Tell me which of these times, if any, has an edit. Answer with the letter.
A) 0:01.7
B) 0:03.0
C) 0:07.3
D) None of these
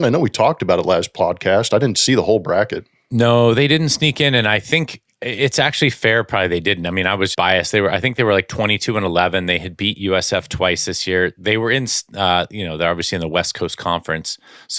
C